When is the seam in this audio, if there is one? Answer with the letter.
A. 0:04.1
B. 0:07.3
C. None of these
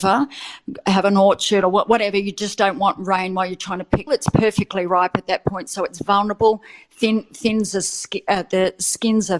A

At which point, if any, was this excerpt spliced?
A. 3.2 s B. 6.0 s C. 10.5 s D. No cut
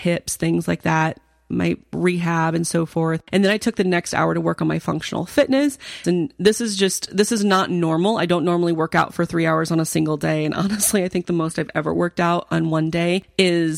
B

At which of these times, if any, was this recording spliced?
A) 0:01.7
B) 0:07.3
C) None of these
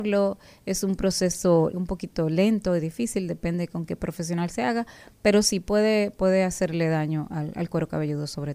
A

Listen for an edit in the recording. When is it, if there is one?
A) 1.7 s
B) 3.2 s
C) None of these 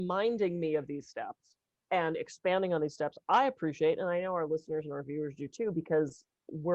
A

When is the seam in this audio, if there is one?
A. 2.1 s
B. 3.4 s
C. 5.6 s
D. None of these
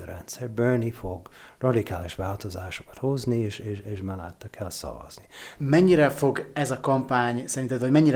C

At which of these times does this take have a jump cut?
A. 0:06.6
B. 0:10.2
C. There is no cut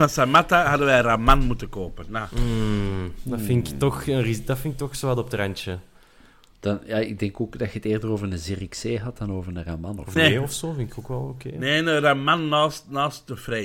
B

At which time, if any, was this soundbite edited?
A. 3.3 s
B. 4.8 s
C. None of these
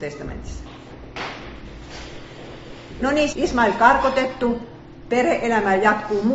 A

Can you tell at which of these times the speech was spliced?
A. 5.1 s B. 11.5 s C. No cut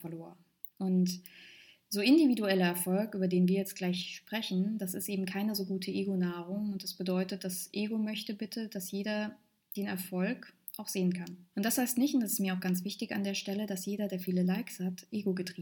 B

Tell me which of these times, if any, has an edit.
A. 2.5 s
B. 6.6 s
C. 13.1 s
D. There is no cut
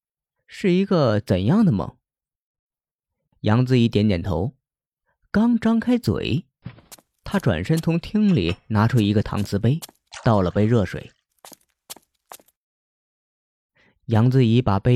B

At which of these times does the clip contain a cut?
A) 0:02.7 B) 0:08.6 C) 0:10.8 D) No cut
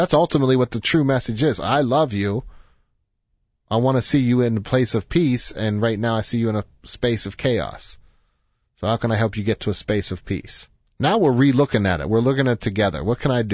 C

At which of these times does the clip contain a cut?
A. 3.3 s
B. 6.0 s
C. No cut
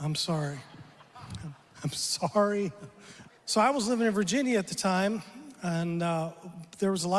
A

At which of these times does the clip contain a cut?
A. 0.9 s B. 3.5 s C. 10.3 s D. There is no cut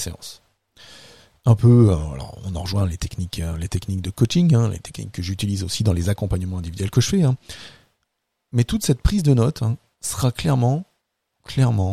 D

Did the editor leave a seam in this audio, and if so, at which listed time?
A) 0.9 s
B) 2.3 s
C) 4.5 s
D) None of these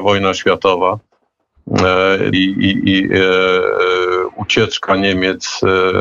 B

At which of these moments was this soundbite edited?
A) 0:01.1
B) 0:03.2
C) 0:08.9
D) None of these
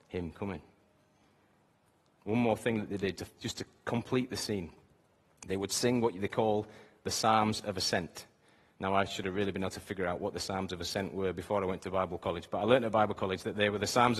B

